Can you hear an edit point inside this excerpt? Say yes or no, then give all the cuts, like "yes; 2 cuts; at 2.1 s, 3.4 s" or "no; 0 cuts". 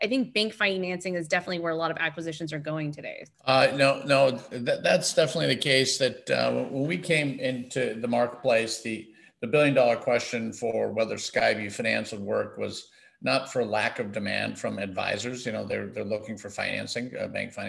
yes; 1 cut; at 3.3 s